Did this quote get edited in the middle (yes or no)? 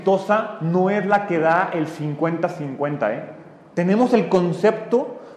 no